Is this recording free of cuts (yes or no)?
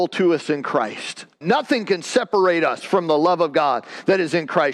no